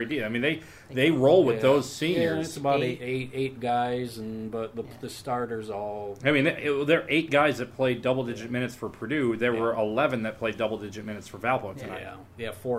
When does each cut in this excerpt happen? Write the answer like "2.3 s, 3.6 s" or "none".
none